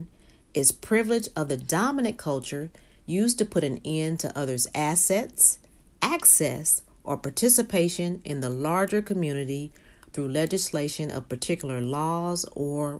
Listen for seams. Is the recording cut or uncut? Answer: uncut